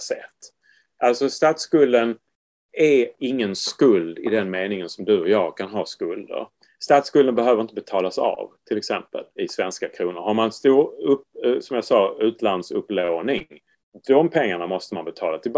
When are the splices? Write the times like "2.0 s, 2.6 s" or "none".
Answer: 9.4 s